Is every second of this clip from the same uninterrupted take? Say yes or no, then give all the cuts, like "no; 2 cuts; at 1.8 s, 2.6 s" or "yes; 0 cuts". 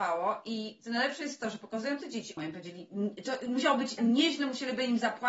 no; 2 cuts; at 2.4 s, 4.0 s